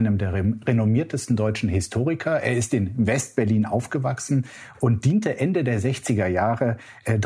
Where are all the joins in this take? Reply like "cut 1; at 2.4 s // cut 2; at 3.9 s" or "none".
none